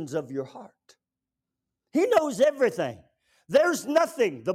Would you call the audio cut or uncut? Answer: uncut